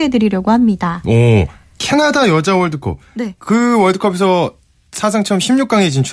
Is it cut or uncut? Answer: uncut